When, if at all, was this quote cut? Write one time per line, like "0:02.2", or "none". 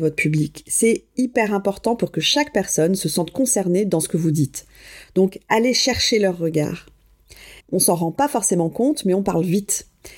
0:07.6